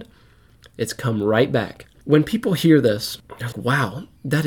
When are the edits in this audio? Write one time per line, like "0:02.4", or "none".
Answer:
0:01.9
0:03.5

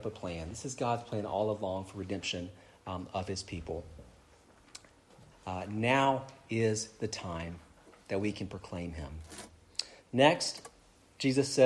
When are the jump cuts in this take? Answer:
0:05.3
0:10.0

